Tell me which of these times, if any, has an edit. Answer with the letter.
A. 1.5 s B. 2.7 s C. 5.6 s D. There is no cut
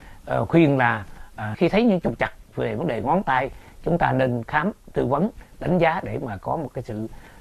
A